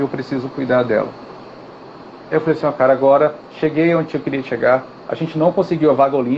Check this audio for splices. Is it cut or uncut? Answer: cut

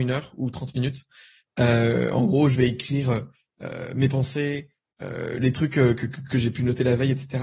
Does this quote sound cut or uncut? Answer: uncut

